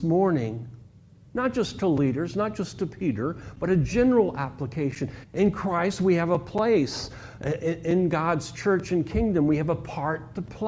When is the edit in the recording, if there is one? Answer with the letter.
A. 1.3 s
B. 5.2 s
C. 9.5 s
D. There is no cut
B